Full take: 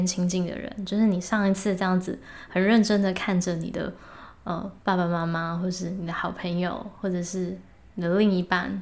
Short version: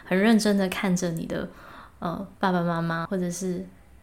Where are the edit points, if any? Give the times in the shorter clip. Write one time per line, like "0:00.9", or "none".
0:03.0